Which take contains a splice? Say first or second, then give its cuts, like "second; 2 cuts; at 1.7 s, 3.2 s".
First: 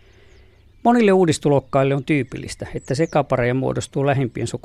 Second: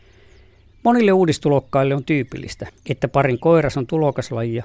second; 1 cut; at 2.7 s